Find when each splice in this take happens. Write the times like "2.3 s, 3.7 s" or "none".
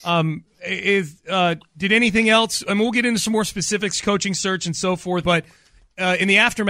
5.2 s